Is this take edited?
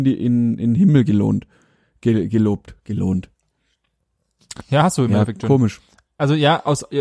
no; 0 cuts

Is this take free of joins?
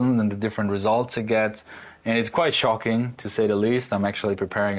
yes; 0 cuts

